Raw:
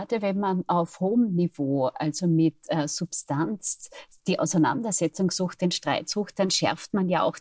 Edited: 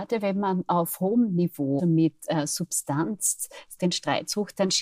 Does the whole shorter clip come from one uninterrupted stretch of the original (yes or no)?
no